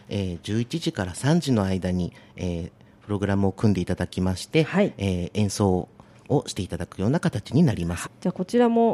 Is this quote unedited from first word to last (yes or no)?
no